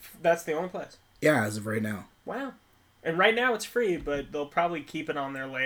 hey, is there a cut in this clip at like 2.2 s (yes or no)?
no